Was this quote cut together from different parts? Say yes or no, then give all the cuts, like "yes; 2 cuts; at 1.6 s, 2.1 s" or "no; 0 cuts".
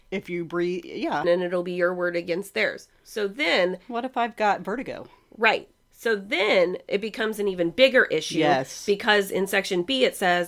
yes; 1 cut; at 1.2 s